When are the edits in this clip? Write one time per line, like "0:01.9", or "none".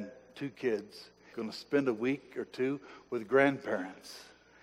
0:01.3